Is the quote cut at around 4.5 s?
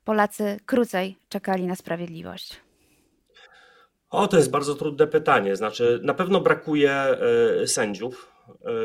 yes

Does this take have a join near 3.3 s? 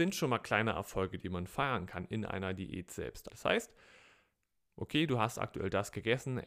yes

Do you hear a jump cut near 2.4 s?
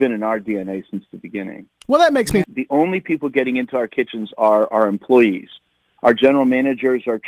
yes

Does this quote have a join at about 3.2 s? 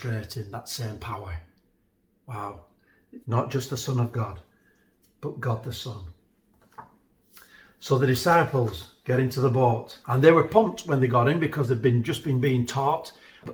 yes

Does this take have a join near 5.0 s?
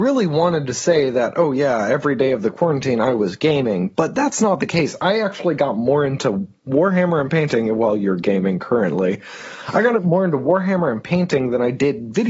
no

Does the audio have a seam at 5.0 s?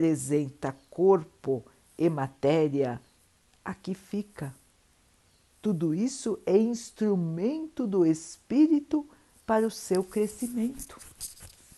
no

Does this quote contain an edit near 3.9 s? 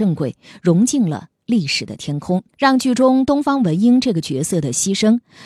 no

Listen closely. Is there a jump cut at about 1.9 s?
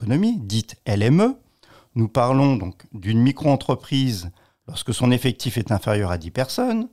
no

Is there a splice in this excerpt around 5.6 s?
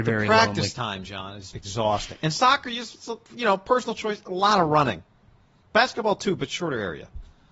no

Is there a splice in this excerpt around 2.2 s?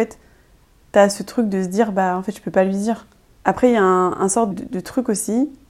no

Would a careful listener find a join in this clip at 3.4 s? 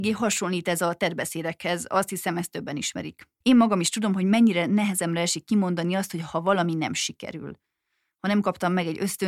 yes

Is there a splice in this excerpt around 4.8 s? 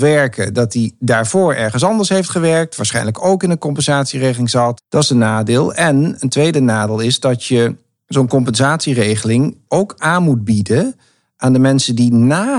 yes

